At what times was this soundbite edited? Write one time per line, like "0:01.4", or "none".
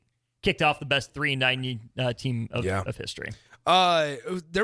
none

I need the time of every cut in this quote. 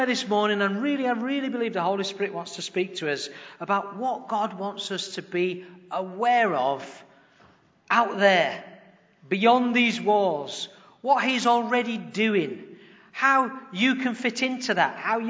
none

